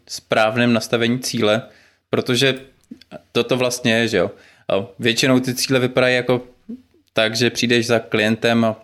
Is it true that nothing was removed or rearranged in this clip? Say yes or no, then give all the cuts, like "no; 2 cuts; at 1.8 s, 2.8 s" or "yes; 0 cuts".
yes; 0 cuts